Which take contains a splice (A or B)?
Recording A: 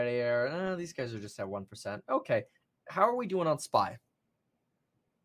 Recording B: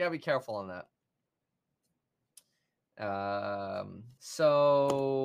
B